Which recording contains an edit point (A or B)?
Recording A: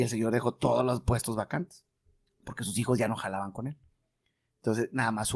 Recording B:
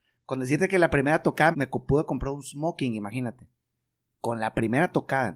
B